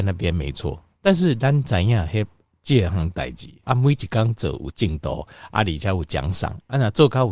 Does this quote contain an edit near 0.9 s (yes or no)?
no